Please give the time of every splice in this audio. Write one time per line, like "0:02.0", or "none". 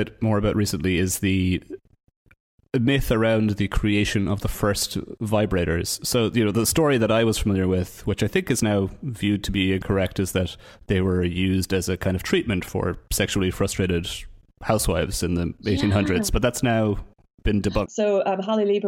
0:17.9